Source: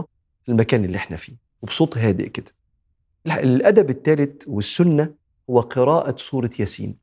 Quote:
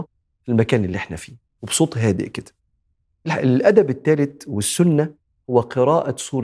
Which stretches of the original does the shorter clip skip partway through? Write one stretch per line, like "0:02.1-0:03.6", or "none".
none

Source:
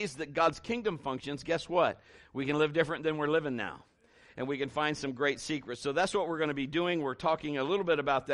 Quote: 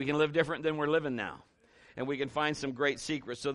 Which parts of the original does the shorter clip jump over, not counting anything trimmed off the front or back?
none

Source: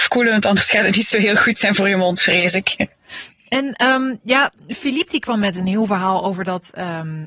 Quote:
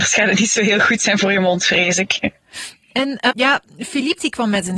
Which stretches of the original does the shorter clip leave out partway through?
0:03.9-0:04.2

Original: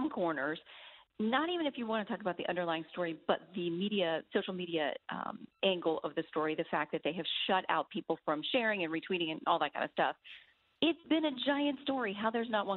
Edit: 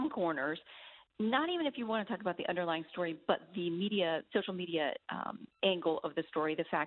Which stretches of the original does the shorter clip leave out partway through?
none

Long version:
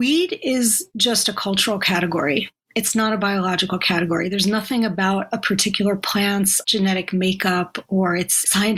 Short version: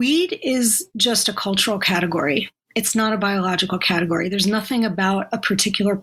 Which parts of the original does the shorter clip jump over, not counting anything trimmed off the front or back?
none

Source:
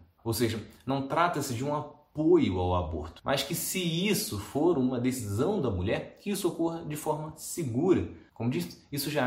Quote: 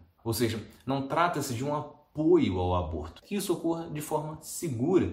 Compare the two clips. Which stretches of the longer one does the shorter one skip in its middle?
0:03.2-0:06.2

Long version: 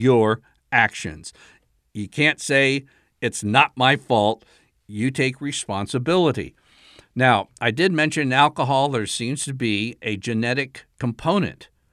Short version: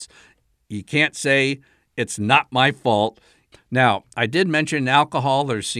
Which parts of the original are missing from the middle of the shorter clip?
0:04.8-0:07.0

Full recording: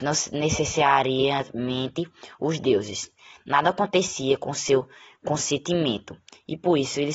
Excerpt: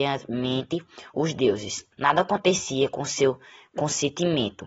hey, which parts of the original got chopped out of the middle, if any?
0:03.2-0:03.4

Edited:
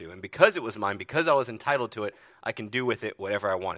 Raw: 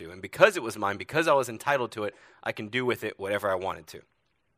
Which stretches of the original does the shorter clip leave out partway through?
none

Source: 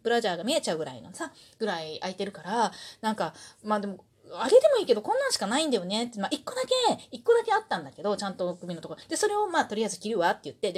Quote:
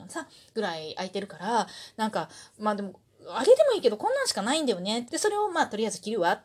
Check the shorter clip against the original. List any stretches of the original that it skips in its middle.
0:06.1-0:09.1

